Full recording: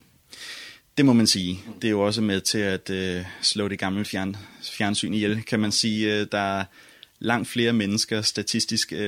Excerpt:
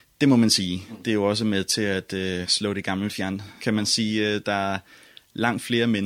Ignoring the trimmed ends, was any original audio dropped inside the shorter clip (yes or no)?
yes